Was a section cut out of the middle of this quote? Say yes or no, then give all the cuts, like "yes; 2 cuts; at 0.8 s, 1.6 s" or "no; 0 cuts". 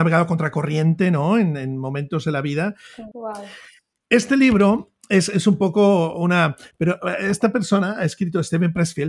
yes; 2 cuts; at 3.1 s, 6.7 s